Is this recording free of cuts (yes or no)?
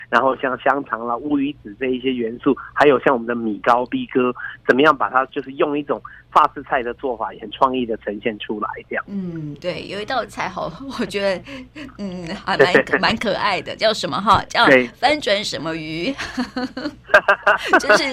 yes